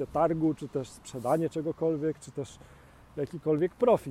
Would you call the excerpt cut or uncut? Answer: uncut